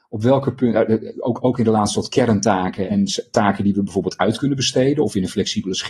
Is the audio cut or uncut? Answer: cut